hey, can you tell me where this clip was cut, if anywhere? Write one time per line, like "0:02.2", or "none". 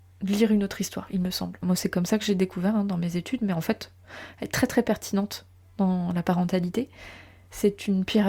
0:01.6